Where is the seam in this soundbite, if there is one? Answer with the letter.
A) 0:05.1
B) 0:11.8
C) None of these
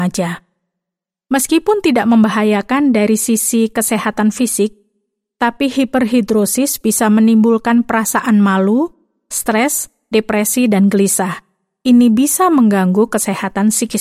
C